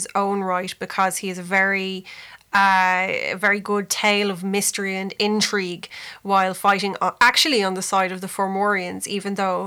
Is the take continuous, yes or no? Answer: yes